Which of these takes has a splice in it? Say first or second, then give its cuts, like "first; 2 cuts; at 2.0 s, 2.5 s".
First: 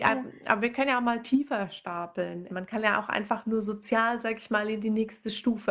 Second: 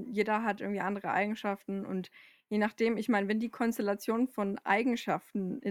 first; 1 cut; at 2.5 s